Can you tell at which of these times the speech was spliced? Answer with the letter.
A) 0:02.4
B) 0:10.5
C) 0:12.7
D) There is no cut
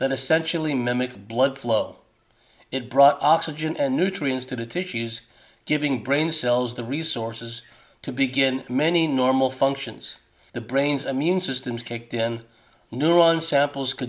B